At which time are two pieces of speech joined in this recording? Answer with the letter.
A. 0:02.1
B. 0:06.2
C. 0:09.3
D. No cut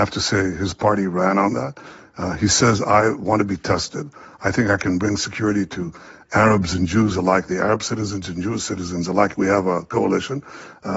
C